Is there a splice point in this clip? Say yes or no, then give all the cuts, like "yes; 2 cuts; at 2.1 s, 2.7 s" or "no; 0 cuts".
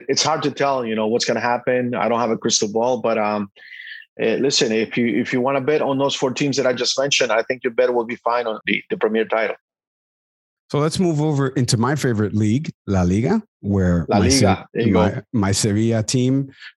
yes; 1 cut; at 8.6 s